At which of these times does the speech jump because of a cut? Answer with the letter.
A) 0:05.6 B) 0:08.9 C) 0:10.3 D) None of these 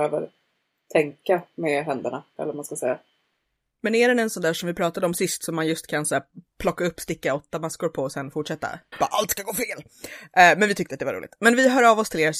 B